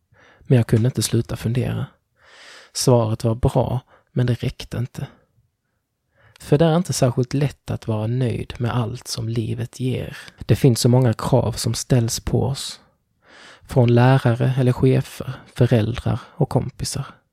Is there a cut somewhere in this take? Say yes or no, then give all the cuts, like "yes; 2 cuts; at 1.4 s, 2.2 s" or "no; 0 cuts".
yes; 1 cut; at 10.4 s